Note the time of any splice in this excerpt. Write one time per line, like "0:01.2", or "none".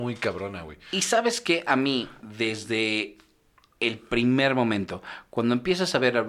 0:02.2